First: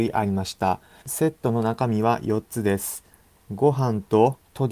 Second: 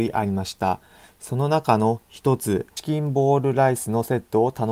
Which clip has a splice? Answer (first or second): first